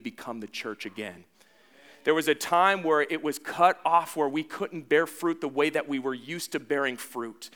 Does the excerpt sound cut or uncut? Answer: uncut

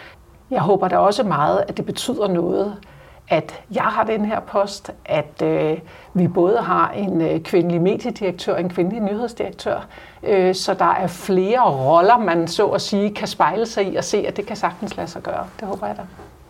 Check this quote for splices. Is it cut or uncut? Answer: uncut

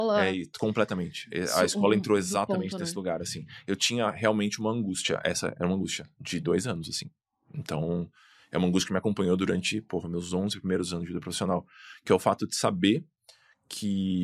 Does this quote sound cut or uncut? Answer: uncut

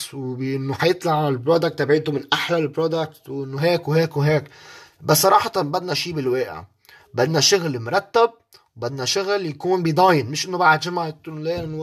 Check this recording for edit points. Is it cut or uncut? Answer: uncut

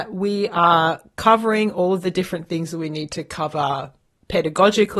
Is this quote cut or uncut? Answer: uncut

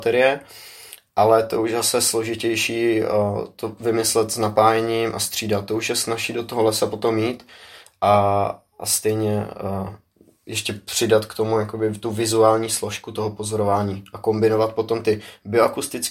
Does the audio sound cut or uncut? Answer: uncut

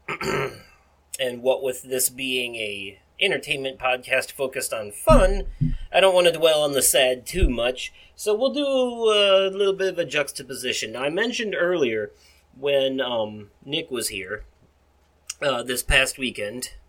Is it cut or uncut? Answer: uncut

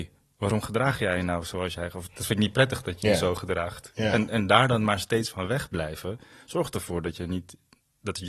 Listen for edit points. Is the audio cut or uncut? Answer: uncut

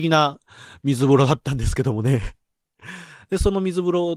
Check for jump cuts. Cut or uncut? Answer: uncut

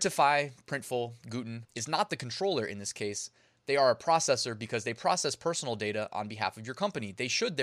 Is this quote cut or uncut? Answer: cut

